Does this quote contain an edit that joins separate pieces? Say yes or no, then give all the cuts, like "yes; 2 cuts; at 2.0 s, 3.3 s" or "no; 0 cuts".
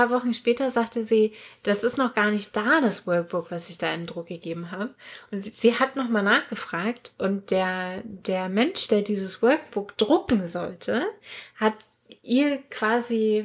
no; 0 cuts